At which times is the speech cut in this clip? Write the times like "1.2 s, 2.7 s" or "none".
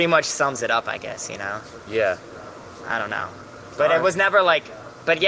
none